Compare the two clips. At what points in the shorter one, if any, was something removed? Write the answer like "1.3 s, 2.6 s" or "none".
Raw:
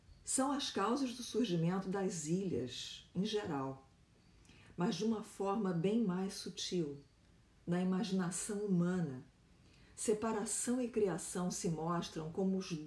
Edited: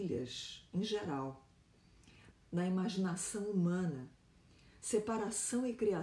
2.3 s